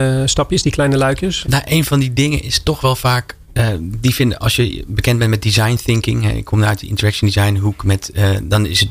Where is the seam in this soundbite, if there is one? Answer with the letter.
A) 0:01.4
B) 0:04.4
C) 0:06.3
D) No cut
A